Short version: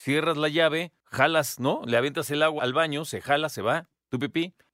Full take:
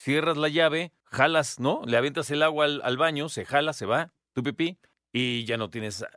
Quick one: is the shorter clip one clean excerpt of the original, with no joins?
no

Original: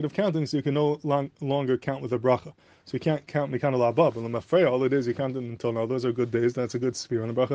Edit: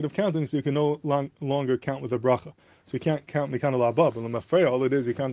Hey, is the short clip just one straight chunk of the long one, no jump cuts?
yes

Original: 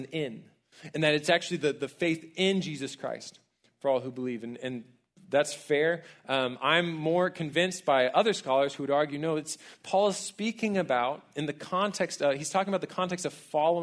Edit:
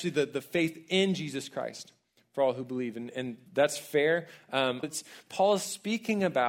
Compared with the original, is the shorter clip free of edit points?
no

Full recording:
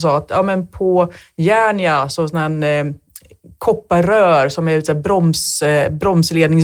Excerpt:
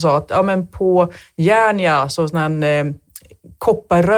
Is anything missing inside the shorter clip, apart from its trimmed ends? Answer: no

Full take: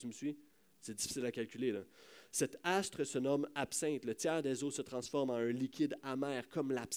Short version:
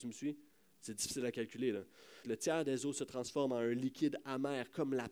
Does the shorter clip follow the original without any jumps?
no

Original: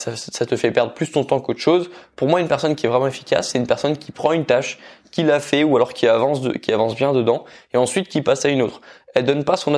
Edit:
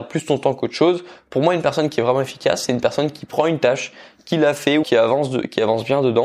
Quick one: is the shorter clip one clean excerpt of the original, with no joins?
no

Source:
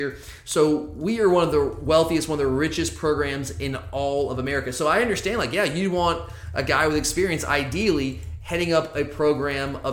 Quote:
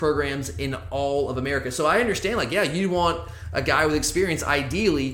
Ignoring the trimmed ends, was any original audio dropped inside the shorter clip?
no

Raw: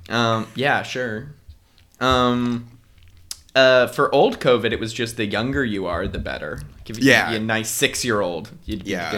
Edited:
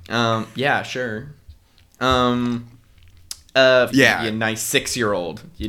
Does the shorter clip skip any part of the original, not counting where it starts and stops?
yes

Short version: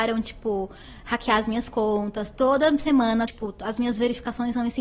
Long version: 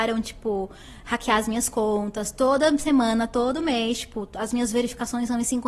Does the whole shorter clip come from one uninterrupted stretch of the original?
no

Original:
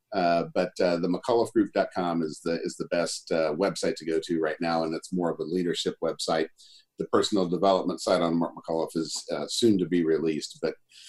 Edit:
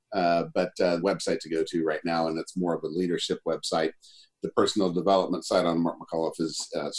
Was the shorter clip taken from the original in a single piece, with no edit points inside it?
no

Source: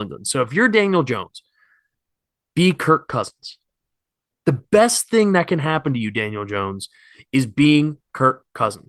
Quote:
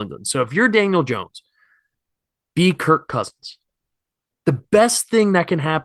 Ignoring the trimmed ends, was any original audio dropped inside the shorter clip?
no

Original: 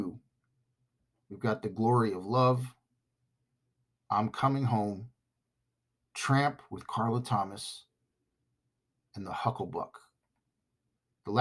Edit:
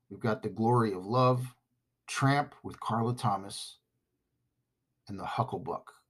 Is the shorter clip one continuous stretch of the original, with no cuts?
no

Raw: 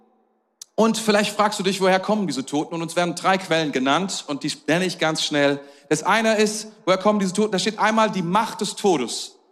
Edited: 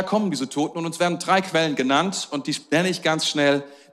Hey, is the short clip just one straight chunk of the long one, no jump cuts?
yes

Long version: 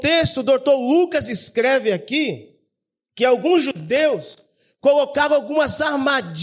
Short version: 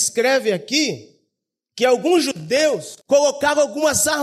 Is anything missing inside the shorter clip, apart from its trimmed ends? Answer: yes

